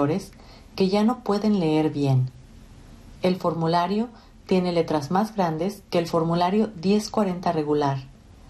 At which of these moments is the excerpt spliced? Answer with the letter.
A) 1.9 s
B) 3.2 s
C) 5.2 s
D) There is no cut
D